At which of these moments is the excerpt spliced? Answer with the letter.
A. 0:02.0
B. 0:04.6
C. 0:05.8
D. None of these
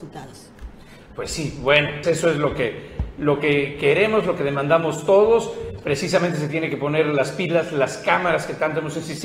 A